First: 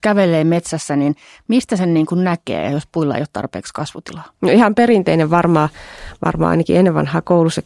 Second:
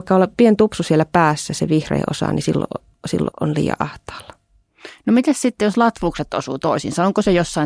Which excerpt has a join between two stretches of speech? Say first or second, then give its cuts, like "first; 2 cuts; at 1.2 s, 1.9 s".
second; 1 cut; at 3.3 s